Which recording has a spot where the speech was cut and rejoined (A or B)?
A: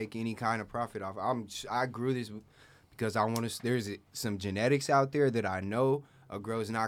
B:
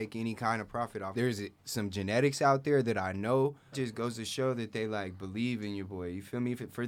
B